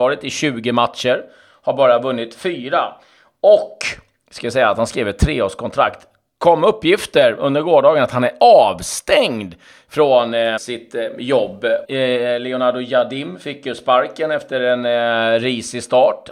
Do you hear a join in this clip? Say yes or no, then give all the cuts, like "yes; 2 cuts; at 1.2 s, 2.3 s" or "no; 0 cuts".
yes; 2 cuts; at 10.6 s, 11.8 s